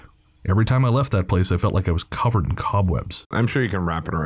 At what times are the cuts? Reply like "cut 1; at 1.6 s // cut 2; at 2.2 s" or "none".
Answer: cut 1; at 3.3 s